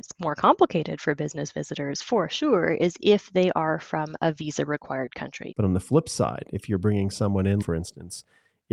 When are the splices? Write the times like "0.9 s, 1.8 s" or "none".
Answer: 5.5 s, 7.6 s